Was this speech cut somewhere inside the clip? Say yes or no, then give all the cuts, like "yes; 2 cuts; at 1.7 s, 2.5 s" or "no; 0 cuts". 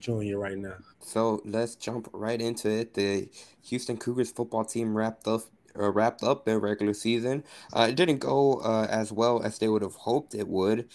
yes; 1 cut; at 0.9 s